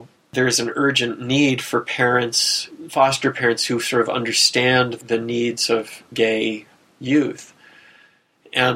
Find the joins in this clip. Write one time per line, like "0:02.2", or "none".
none